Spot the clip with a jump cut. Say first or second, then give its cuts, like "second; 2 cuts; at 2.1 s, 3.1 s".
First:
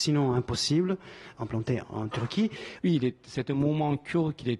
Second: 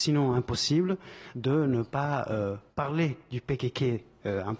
first; 2 cuts; at 1.3 s, 2.8 s